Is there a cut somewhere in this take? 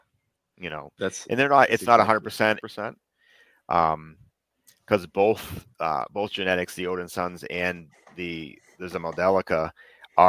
yes; 1 cut; at 2.6 s

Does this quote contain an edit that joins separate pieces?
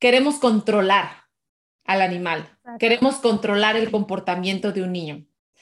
no; 0 cuts

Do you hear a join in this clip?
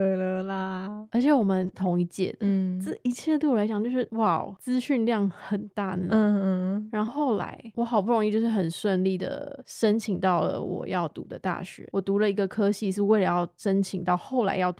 yes; 1 cut; at 7.1 s

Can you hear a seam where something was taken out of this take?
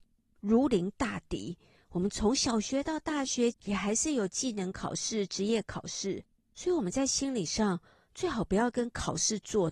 yes; 1 cut; at 3.5 s

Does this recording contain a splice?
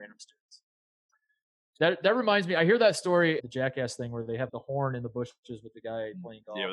yes; 2 cuts; at 3.4 s, 4.5 s

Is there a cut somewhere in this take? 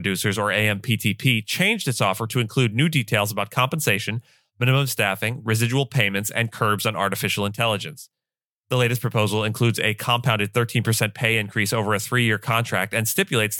no; 0 cuts

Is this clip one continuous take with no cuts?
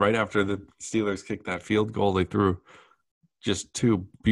yes; 0 cuts

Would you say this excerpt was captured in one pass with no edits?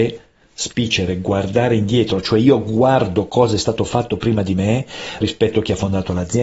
no; 1 cut; at 5.2 s

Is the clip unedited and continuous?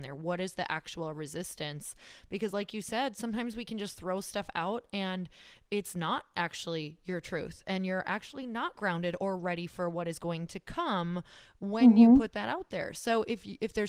yes; 0 cuts

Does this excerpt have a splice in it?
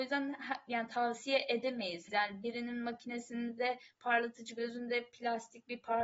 yes; 1 cut; at 2.1 s

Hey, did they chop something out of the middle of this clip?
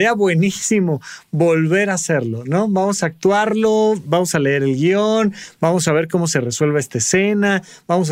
no; 0 cuts

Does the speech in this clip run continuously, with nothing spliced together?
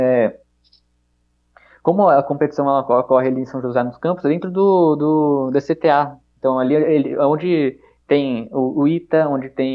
yes; 0 cuts

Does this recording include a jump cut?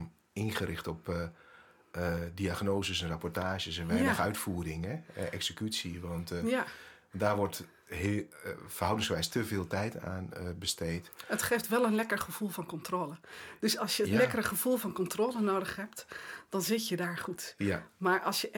no; 0 cuts

